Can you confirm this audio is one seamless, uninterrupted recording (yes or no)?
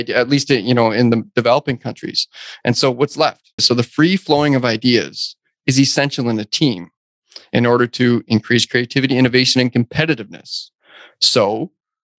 no